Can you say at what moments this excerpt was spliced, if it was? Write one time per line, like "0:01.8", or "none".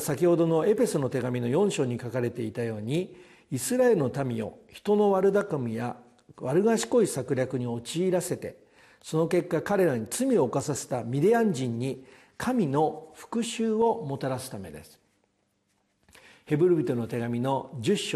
none